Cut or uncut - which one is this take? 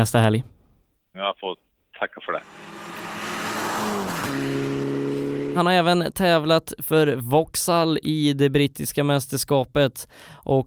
cut